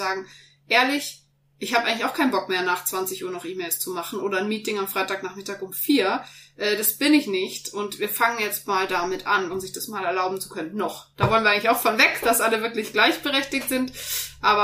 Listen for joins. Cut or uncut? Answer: cut